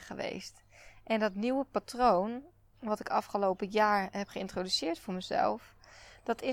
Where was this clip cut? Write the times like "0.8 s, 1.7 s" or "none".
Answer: none